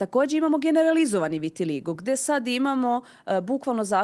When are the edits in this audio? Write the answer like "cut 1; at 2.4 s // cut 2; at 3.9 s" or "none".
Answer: none